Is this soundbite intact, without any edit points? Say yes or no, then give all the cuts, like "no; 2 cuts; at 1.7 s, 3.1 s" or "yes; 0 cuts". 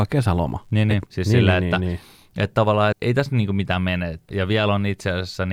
no; 3 cuts; at 1.1 s, 2.9 s, 4.3 s